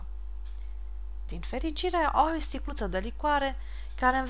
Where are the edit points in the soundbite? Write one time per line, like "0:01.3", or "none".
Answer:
0:01.3